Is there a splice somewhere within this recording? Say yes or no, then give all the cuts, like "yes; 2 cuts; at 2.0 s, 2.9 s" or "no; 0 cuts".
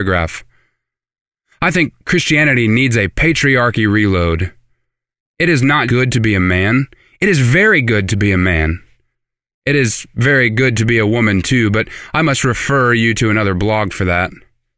yes; 1 cut; at 5.9 s